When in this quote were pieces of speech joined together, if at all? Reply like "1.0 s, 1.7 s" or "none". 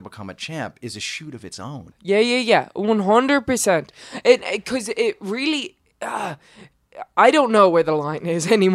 1.9 s